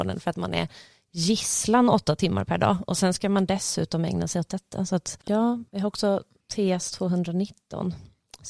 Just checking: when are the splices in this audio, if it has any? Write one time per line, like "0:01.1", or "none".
none